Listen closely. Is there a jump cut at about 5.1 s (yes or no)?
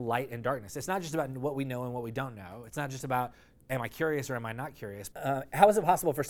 yes